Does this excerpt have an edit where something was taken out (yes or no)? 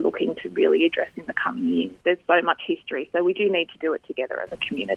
yes